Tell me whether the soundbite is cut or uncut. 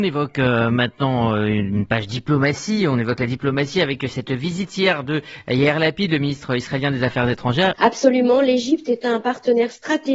cut